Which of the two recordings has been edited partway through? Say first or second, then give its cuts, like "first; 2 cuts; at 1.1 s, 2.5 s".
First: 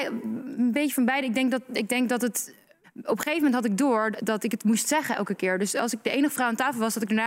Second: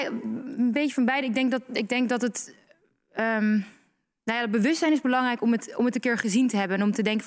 first; 2 cuts; at 2.8 s, 4.1 s